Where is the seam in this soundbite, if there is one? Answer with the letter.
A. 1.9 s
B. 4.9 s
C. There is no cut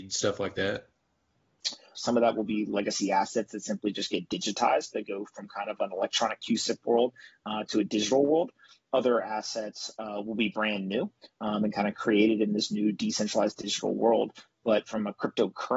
A